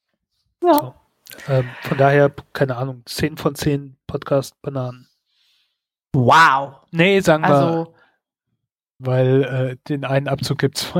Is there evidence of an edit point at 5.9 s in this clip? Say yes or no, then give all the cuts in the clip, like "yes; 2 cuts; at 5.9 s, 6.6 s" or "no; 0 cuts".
no; 1 cut; at 9.0 s